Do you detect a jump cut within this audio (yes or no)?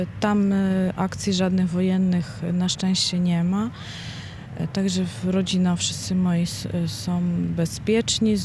no